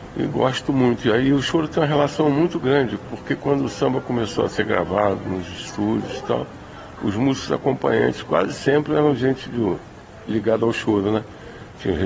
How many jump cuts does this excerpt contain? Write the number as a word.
zero